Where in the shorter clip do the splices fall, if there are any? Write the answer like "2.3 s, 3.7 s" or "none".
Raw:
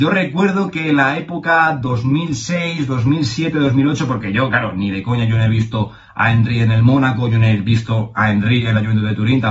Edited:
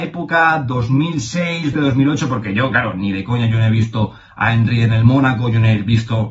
1.7 s